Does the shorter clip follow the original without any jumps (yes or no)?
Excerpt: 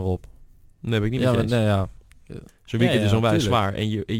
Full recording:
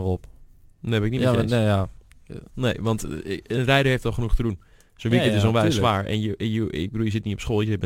no